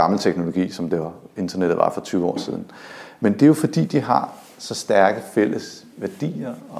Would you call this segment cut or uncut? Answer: uncut